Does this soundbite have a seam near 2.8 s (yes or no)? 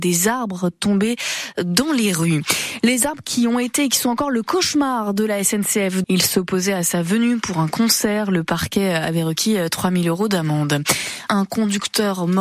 no